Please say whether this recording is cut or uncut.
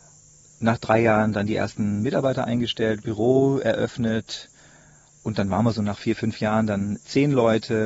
uncut